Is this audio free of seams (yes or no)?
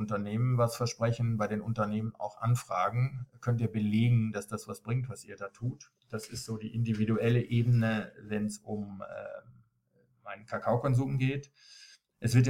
yes